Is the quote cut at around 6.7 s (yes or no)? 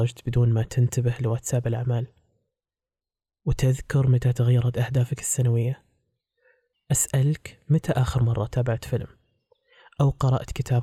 yes